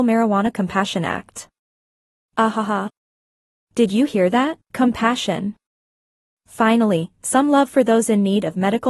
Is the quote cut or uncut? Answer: cut